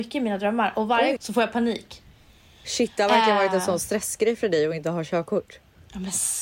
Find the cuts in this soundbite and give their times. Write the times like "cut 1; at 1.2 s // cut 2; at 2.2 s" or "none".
cut 1; at 1.2 s